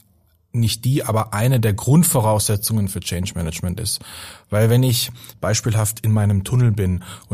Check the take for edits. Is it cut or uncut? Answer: cut